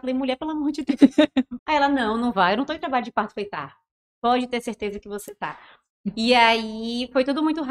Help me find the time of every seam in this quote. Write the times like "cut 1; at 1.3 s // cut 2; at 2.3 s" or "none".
cut 1; at 1.6 s